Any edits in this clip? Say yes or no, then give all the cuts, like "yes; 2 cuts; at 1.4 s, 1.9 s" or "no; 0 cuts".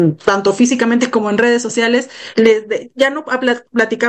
no; 0 cuts